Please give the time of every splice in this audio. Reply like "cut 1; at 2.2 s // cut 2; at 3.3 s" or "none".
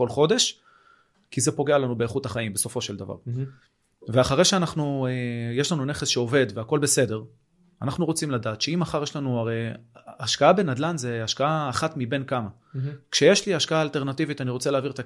none